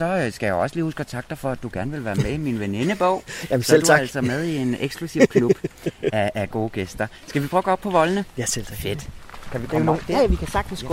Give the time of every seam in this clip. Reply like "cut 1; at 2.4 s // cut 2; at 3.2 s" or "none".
none